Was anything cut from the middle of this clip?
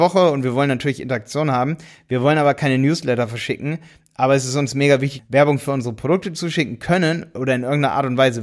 yes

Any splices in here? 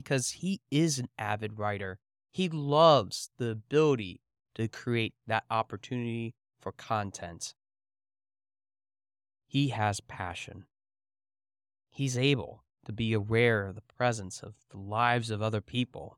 no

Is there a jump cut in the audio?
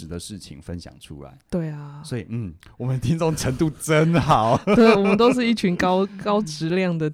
no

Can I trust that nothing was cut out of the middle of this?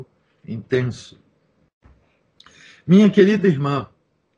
yes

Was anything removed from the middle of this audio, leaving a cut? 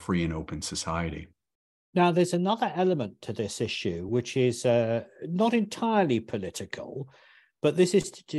no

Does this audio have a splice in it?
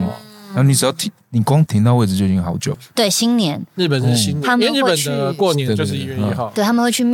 yes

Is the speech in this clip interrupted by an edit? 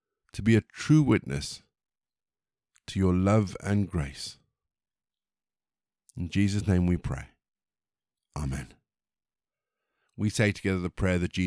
no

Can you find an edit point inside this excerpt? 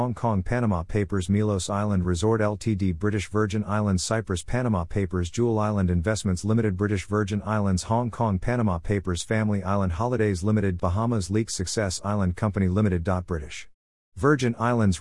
yes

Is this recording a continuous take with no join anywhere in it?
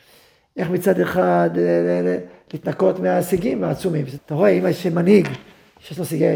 no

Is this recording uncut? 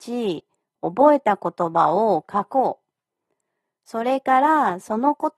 yes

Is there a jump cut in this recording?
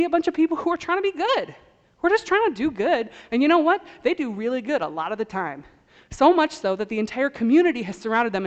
no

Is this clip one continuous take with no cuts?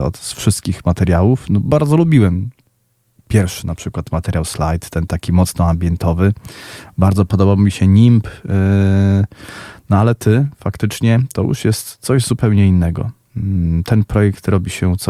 yes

